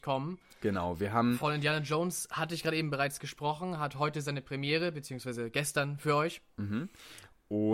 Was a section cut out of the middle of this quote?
no; 0 cuts

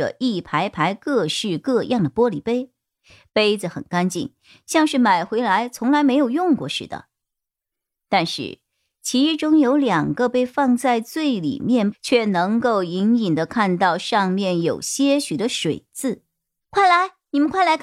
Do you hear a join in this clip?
yes; 2 cuts; at 11.9 s, 16.6 s

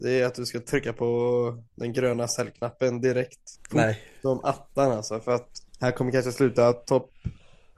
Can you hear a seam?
yes; 2 cuts; at 3.6 s, 5.7 s

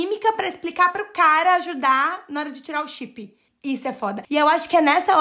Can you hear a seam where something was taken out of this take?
no; 0 cuts

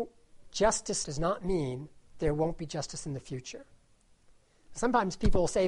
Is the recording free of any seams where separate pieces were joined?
no; 1 cut; at 1.0 s

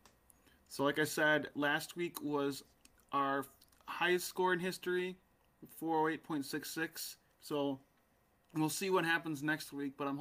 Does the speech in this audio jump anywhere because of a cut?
yes; 1 cut; at 7.3 s

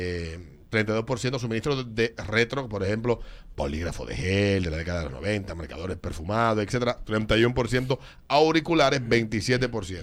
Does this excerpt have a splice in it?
no; 0 cuts

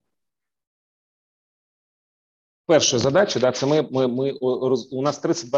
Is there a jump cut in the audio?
no; 0 cuts

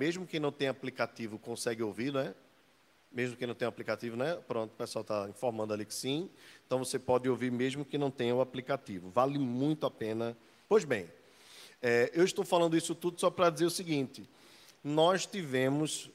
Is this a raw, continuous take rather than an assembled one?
no; 1 cut; at 10.7 s

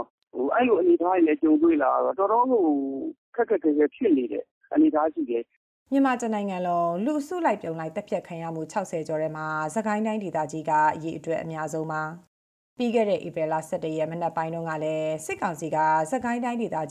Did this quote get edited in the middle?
no; 0 cuts

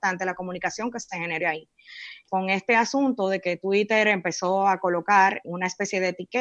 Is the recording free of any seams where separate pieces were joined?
no; 2 cuts; at 2.3 s, 5.4 s

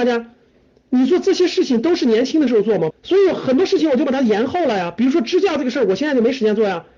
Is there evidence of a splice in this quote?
yes; 1 cut; at 2.9 s

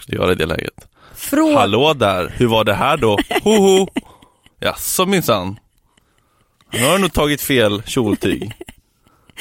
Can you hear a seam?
no; 0 cuts

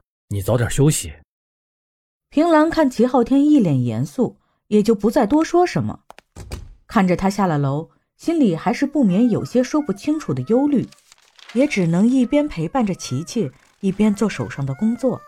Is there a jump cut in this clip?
no; 0 cuts

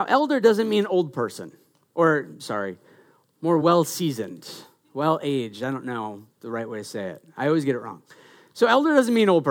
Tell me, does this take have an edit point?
no; 0 cuts

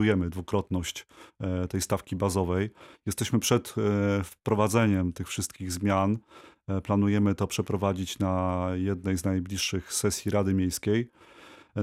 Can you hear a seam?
no; 0 cuts

